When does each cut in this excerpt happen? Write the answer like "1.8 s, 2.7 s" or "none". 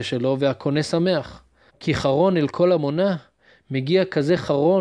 1.7 s